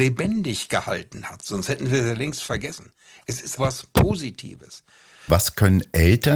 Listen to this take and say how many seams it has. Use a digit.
2